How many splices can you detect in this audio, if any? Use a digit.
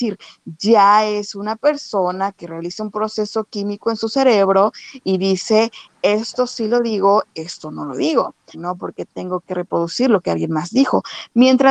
1